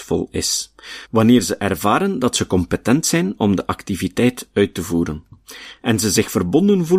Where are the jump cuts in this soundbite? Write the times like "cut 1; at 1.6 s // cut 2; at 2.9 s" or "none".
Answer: cut 1; at 1.1 s